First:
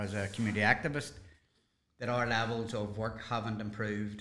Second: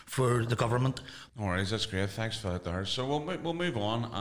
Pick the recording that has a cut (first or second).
second